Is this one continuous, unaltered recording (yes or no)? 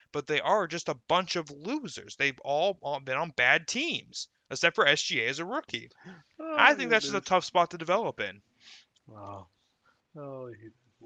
yes